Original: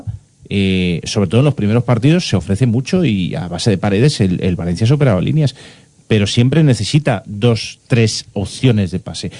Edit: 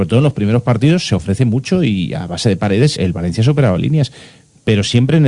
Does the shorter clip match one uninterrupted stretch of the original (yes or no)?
no